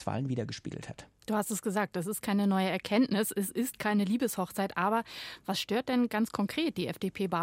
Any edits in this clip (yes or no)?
no